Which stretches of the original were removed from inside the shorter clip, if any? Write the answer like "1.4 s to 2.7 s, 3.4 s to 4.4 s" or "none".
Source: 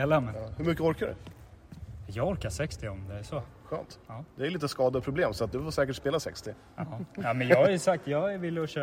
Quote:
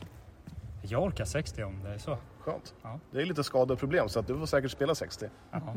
none

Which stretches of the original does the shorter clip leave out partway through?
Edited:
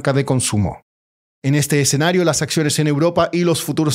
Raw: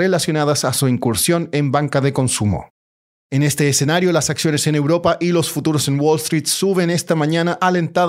none

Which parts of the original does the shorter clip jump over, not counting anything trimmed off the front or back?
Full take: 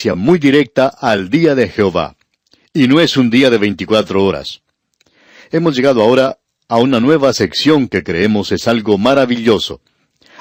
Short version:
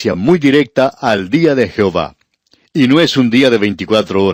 none

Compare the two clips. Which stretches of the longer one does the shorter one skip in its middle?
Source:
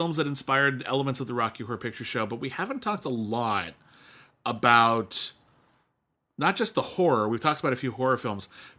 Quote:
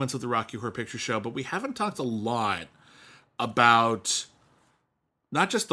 none

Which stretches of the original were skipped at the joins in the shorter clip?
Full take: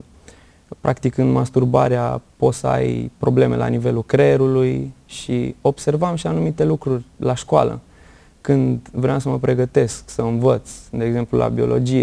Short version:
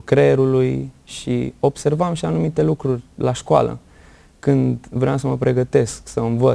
none

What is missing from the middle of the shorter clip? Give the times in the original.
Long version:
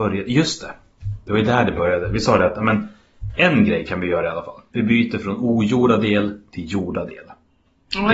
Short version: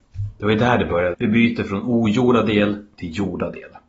2.0 s to 4.7 s

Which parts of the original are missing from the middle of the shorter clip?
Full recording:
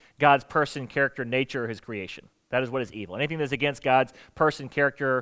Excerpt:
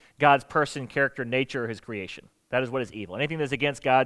none

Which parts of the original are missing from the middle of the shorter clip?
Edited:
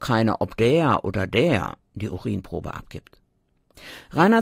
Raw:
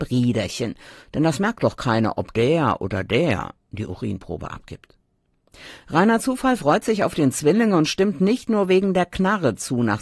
none

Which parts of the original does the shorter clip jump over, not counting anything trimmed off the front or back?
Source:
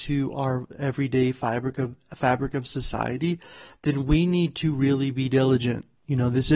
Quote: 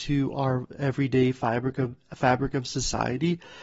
none

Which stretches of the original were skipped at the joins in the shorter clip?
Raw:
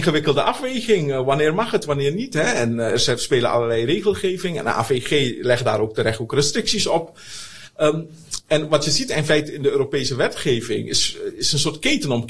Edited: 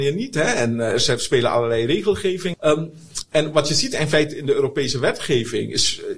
4.5 s to 7.7 s

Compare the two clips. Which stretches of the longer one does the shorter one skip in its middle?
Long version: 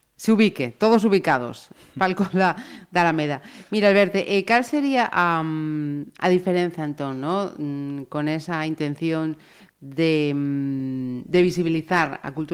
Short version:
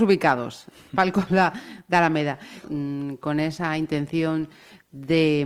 3.7 s to 7.5 s

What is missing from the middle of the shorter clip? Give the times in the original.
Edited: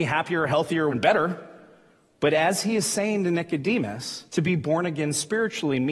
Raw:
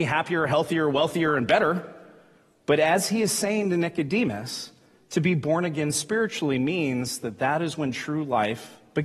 0.9 s to 1.4 s, 4.7 s to 5.1 s

